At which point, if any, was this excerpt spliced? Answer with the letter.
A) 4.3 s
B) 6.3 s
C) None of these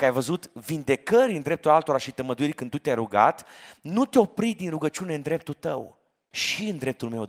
B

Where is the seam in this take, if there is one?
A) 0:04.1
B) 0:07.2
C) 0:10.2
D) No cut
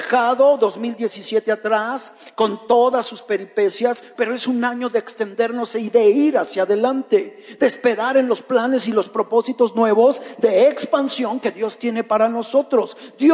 A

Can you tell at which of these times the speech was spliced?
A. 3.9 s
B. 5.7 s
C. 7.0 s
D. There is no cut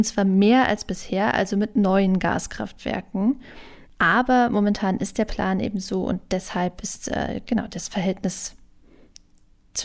A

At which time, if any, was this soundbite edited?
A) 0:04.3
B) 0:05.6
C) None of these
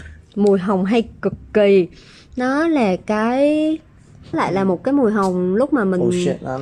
A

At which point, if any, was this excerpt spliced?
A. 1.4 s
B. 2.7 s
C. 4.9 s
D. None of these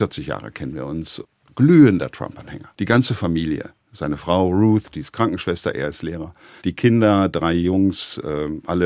B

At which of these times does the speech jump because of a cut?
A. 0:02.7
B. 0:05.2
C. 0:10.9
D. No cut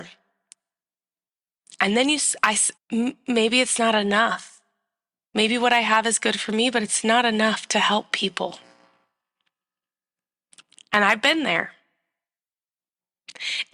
A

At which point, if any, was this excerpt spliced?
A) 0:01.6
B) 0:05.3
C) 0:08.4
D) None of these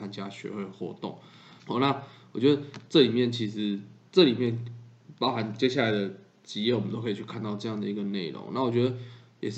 A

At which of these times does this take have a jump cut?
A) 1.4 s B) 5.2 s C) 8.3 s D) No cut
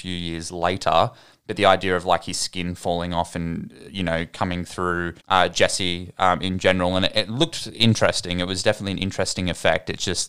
B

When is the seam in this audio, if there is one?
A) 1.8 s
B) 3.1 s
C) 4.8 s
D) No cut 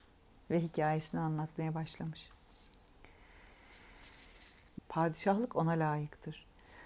C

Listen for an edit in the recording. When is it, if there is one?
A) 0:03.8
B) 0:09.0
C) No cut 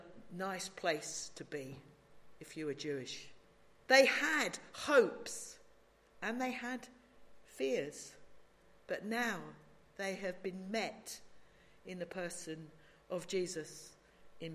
A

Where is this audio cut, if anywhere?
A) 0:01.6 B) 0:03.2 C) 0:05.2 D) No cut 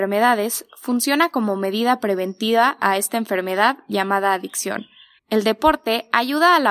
C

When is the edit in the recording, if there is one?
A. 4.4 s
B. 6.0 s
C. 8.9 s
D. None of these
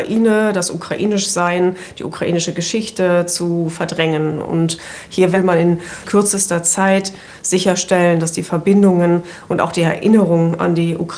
B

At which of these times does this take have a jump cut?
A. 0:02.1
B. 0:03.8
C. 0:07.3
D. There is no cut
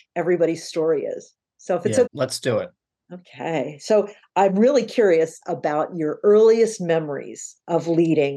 A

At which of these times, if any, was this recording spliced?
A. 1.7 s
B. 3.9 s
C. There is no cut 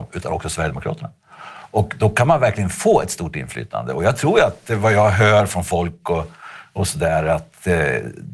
C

